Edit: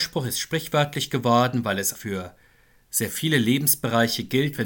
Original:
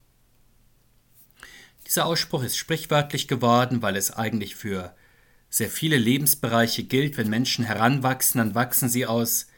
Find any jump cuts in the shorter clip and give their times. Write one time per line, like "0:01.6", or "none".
0:01.9